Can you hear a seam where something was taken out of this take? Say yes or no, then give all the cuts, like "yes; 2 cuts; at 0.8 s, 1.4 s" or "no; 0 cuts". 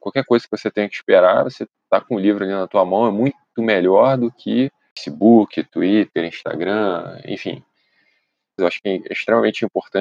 yes; 1 cut; at 8.6 s